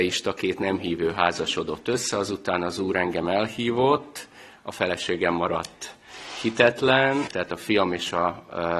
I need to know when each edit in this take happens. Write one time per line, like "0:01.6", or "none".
0:07.3